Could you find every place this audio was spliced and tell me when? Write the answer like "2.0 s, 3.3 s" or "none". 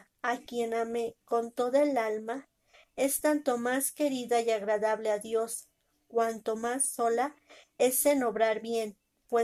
none